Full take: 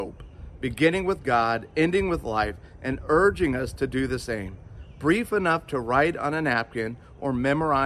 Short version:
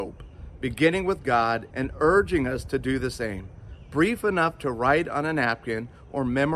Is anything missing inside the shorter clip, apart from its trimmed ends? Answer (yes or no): yes